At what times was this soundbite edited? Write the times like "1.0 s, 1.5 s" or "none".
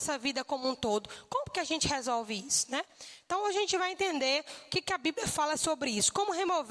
none